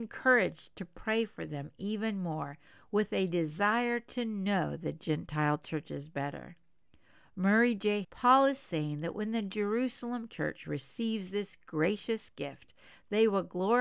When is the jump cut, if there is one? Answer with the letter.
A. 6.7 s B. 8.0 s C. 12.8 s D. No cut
B